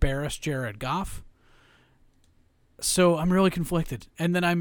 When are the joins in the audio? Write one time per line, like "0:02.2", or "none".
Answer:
none